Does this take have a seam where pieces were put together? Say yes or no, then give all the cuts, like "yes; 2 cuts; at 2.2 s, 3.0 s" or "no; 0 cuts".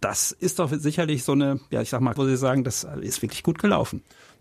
yes; 1 cut; at 2.2 s